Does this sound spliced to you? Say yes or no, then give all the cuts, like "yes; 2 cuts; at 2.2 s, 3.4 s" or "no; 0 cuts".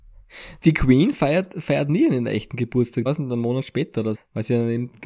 yes; 2 cuts; at 3.1 s, 4.1 s